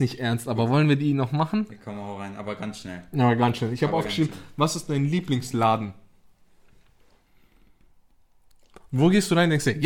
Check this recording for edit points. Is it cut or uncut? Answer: uncut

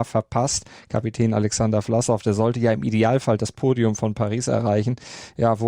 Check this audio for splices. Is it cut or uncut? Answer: uncut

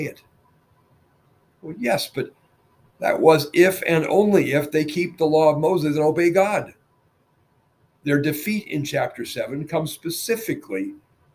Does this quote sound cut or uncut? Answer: cut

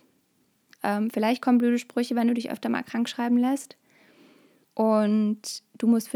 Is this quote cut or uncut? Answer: cut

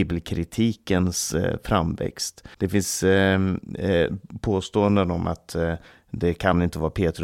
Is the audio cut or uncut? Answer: cut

